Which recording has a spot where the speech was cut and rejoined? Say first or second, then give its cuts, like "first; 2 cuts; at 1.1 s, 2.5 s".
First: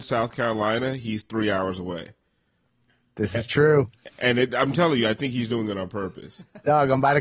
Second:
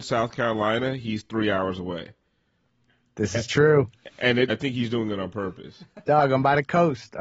second; 1 cut; at 4.5 s